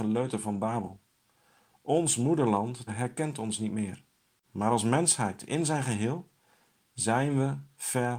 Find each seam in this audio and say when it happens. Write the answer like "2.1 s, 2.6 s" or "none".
2.9 s, 4.4 s